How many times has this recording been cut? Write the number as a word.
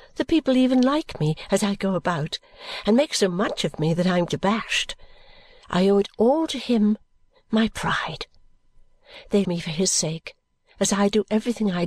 three